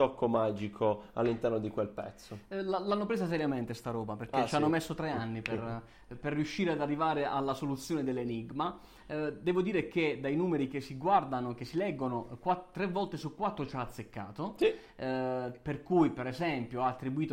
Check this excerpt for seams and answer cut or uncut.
uncut